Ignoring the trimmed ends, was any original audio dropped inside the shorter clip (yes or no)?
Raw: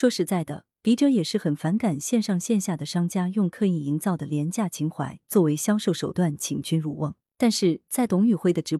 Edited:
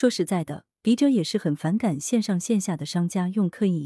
no